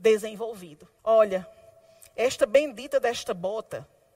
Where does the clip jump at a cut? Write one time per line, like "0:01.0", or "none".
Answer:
0:01.0